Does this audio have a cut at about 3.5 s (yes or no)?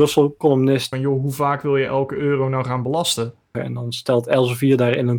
yes